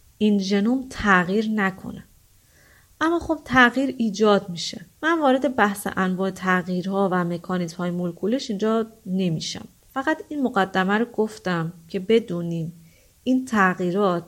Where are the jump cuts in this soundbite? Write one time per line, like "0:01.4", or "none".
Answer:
0:05.0